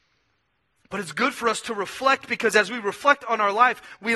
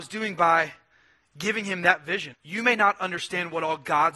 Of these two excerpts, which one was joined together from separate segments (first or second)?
second